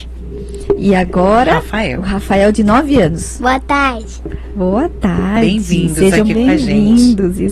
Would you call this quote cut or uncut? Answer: uncut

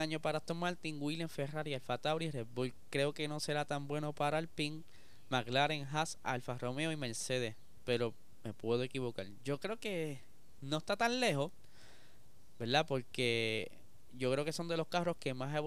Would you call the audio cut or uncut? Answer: uncut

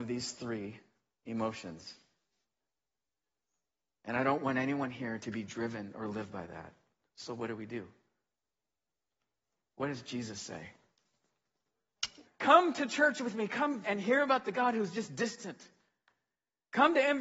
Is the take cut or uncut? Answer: cut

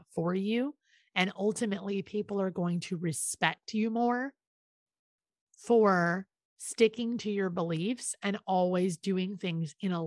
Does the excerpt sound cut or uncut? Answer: uncut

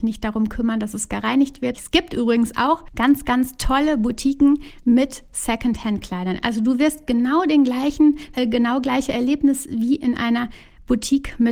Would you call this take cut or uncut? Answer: cut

